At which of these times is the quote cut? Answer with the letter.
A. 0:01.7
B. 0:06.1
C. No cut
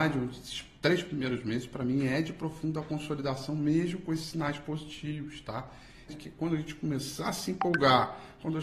B